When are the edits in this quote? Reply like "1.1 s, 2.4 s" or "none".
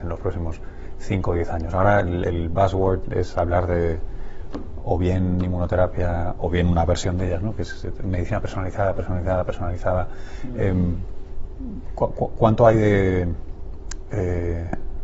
none